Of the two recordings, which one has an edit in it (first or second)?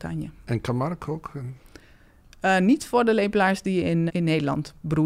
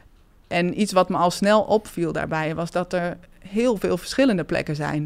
first